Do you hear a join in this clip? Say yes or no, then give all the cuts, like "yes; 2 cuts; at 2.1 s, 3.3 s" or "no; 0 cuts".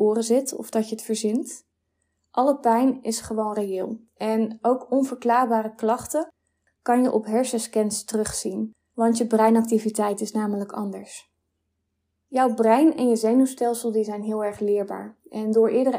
no; 0 cuts